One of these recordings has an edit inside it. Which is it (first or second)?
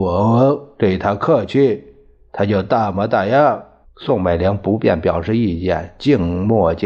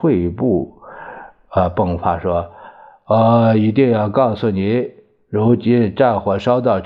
first